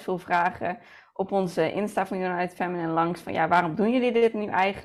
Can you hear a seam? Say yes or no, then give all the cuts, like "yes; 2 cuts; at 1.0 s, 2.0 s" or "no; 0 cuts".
no; 0 cuts